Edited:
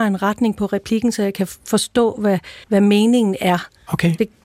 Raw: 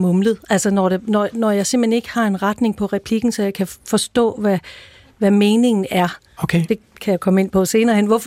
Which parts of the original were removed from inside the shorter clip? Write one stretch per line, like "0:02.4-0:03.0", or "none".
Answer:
0:04.8-0:05.1